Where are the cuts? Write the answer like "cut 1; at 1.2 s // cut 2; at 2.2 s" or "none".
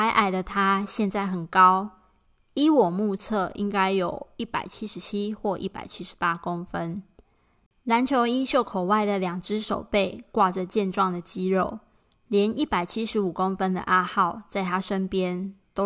none